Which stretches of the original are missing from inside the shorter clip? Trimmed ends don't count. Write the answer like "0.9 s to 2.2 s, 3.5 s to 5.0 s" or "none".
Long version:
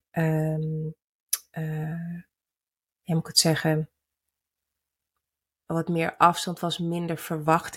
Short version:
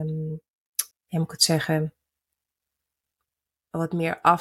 1.4 s to 2.9 s